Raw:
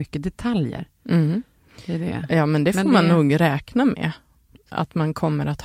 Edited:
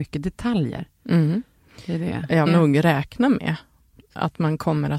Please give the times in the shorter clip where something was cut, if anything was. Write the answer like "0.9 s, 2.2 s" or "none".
2.5 s